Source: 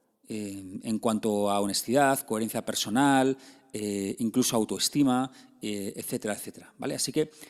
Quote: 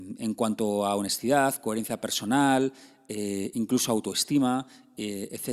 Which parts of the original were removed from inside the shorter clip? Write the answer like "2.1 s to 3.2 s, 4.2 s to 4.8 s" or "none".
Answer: none

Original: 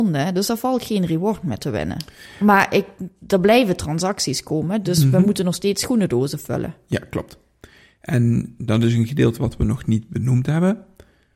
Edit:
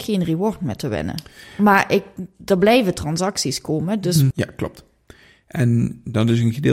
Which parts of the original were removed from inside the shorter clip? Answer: 5.1 s to 6.8 s

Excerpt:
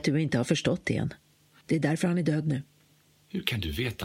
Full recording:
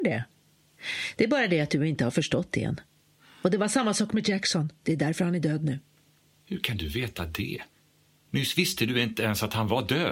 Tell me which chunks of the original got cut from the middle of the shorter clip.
3.3 s to 4.8 s

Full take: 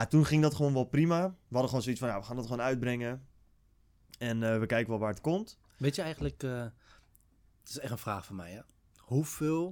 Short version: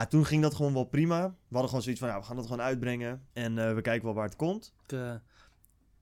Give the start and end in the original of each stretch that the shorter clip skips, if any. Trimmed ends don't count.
3.3 s to 4.2 s, 5.7 s to 6.4 s

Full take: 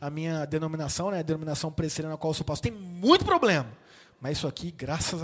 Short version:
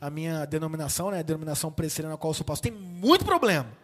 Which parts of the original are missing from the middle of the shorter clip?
none

